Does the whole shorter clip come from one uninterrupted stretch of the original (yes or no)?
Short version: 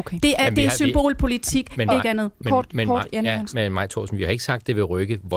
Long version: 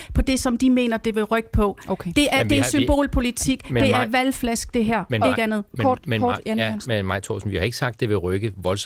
no